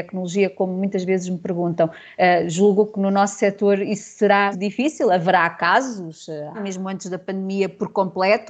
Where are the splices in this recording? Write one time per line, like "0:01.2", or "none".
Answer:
0:04.5
0:06.5